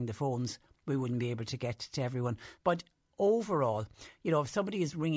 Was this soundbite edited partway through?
yes; 1 cut; at 2.6 s

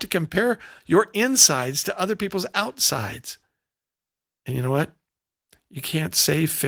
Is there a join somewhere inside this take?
no; 0 cuts

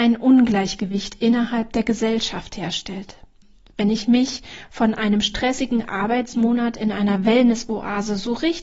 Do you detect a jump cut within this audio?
no; 0 cuts

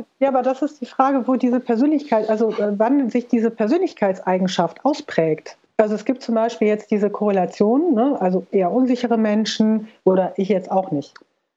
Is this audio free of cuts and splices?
no; 2 cuts; at 8.5 s, 10.0 s

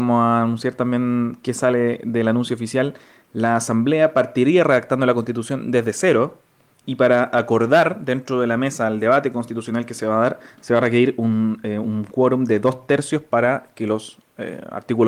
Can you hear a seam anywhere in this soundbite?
no; 0 cuts

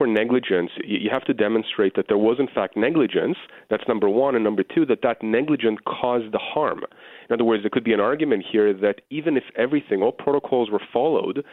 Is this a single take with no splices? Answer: yes; 0 cuts

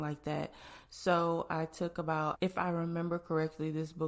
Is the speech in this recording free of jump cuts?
no; 1 cut; at 2.3 s

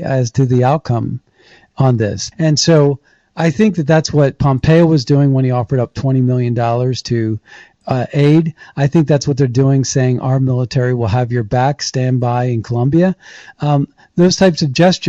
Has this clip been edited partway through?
yes; 1 cut; at 2.3 s

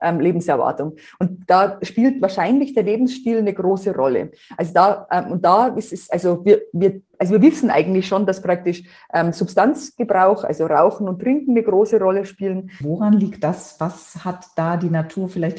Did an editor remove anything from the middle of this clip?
yes; 2 cuts; at 7.1 s, 12.8 s

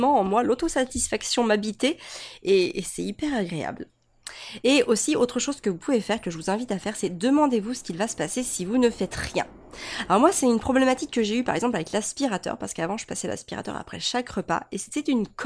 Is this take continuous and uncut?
yes; 0 cuts

